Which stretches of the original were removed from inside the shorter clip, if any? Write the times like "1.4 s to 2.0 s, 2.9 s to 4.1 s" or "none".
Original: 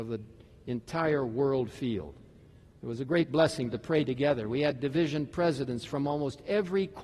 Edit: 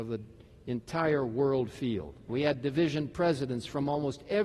2.3 s to 4.5 s